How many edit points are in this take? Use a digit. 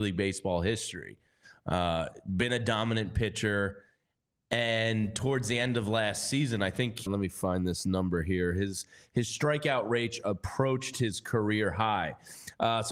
1